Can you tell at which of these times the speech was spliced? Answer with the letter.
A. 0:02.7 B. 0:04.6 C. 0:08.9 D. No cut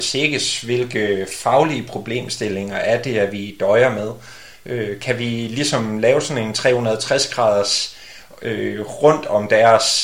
D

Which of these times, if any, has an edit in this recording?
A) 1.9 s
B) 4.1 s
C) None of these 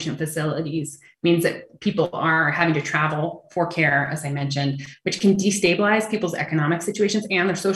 C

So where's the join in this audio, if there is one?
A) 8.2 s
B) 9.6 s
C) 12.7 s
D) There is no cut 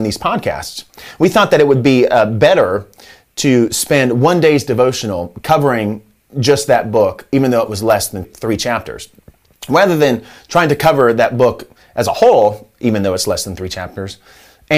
A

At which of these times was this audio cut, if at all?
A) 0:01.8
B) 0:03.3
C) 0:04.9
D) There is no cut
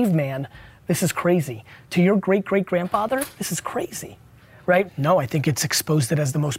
C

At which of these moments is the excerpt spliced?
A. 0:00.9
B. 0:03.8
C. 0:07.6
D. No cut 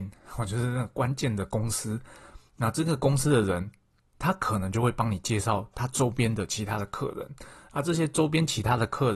D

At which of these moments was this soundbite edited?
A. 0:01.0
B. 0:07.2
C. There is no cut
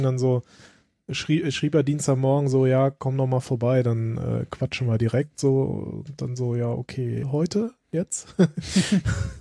B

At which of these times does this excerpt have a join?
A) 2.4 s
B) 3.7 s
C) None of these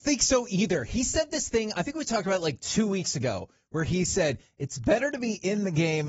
C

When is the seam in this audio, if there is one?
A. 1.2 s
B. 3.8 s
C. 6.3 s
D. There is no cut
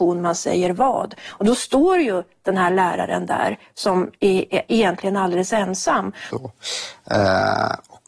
C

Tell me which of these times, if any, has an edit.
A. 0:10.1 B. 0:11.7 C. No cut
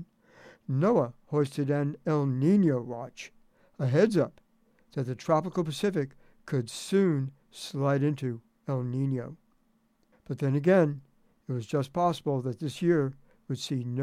A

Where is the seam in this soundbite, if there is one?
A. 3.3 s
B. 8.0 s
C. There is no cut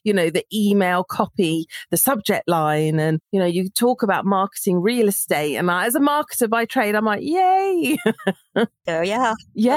A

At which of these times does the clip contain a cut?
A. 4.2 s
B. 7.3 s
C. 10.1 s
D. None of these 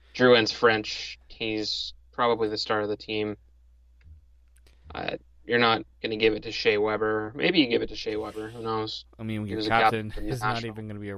D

